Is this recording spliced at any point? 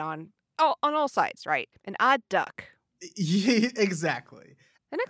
yes; 1 cut; at 1.8 s

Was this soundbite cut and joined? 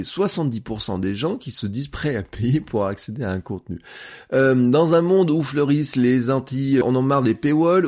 yes; 1 cut; at 6.8 s

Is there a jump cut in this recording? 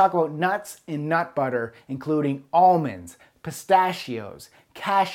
no; 0 cuts

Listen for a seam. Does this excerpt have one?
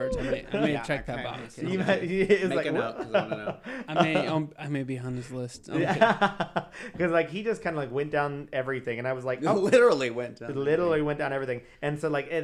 no; 0 cuts

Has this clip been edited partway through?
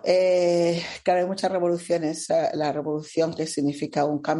no; 0 cuts

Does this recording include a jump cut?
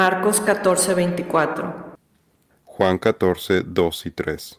yes; 1 cut; at 2.5 s

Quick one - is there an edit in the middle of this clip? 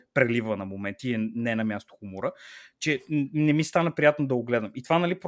no; 0 cuts

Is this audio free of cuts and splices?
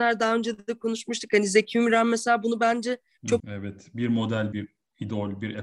no; 2 cuts; at 3.4 s, 4.5 s

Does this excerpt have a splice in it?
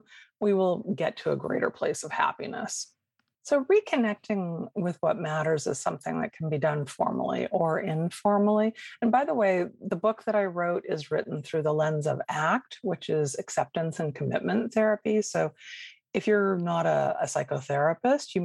yes; 1 cut; at 3.3 s

